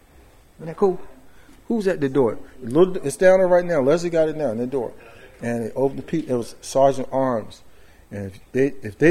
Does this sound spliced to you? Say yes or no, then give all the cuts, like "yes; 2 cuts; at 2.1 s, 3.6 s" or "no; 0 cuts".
no; 0 cuts